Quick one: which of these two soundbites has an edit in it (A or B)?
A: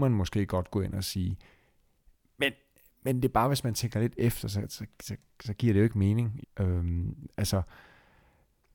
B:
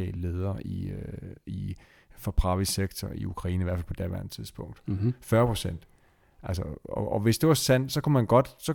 A